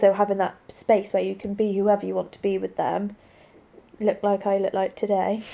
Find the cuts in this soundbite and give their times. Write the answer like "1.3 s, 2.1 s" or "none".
none